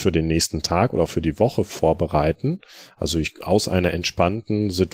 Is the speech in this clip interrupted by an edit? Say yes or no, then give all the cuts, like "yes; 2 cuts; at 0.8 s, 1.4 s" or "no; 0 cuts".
no; 0 cuts